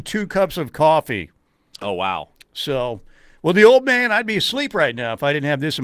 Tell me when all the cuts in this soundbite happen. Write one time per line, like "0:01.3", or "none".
none